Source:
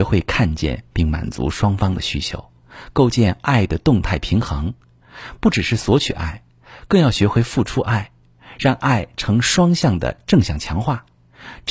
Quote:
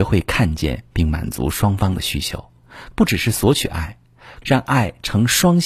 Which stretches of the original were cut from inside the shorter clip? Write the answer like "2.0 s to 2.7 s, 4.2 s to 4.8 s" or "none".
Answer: 2.9 s to 5.4 s, 6.9 s to 8.6 s